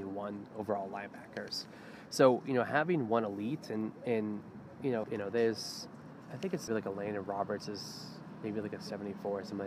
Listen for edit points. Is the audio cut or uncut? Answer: cut